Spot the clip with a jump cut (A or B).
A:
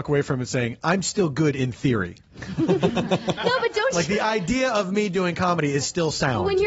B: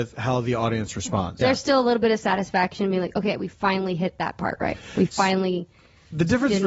B